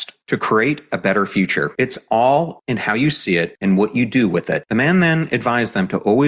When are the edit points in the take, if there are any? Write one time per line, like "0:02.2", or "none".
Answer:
none

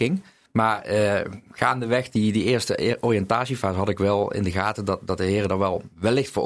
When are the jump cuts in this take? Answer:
none

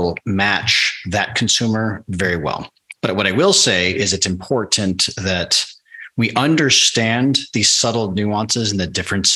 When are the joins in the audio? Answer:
0:02.9

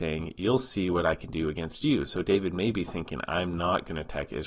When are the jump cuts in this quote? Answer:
none

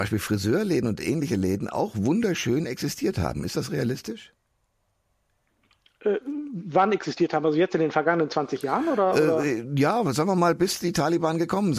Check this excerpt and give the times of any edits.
none

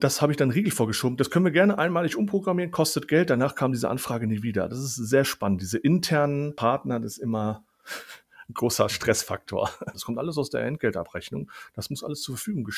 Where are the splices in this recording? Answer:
0:09.9

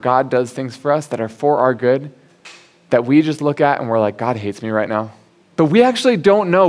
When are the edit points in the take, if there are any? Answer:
0:05.5

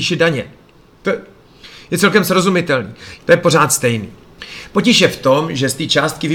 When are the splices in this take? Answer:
0:03.2

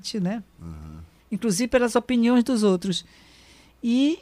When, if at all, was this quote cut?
0:01.2

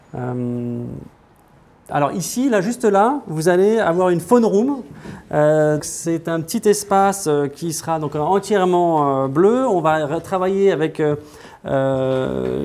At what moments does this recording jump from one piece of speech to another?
0:05.8

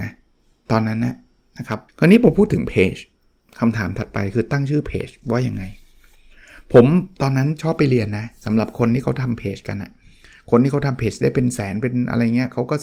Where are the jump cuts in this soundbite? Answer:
0:01.9

